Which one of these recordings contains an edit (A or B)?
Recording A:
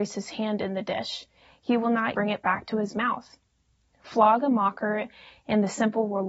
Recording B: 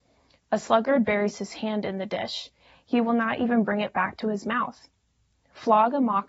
A